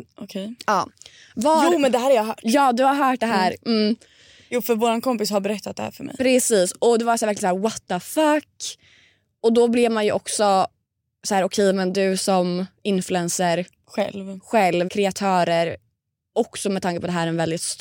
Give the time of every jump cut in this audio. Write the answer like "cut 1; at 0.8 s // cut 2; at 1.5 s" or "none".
cut 1; at 14.9 s